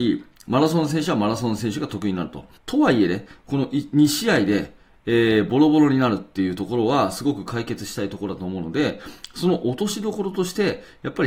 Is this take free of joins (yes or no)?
no